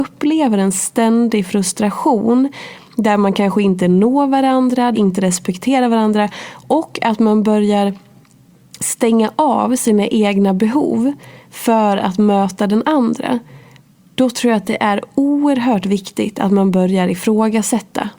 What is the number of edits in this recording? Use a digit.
1